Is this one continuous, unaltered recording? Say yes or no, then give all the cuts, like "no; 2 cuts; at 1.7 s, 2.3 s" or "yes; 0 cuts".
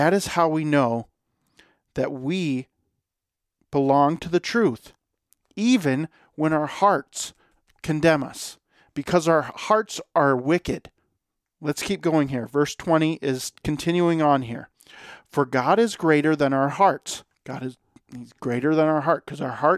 no; 1 cut; at 11.5 s